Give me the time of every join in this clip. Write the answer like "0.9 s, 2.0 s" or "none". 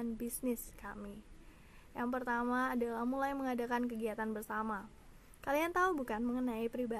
none